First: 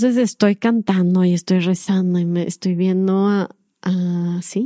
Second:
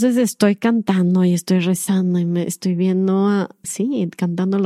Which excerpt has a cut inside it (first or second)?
second